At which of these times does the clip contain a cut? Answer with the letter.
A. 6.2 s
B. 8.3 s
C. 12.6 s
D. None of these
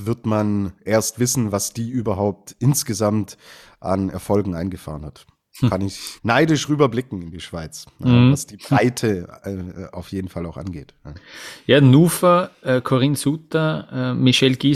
A